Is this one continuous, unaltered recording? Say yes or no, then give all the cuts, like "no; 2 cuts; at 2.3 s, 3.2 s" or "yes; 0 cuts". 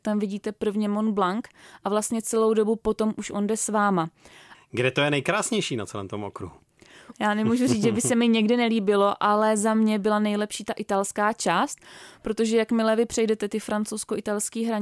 no; 2 cuts; at 4.5 s, 7.1 s